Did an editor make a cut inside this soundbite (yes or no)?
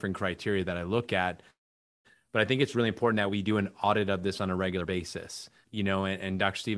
yes